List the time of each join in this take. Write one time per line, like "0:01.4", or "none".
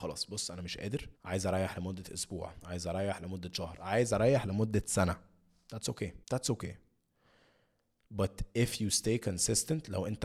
0:01.1
0:06.2